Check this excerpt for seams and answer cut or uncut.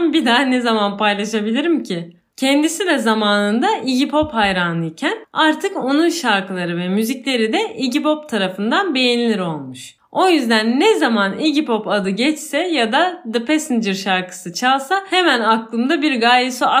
cut